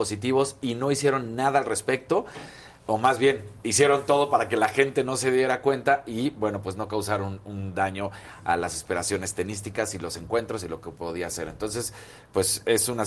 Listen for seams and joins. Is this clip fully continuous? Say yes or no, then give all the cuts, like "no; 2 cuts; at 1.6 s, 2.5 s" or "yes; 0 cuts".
yes; 0 cuts